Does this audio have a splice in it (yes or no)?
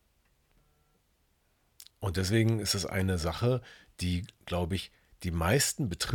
yes